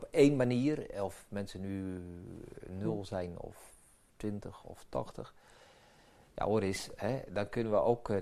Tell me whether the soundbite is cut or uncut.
uncut